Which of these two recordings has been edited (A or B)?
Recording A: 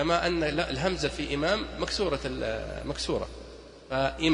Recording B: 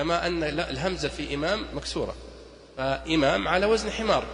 B